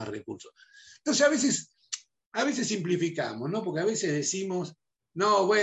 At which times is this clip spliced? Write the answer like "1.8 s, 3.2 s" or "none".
none